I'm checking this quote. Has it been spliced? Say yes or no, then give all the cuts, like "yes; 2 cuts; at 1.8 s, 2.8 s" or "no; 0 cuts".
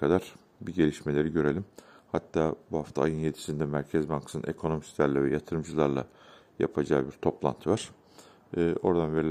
no; 0 cuts